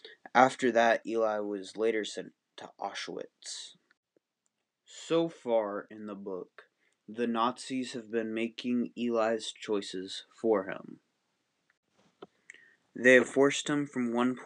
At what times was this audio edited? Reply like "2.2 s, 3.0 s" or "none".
none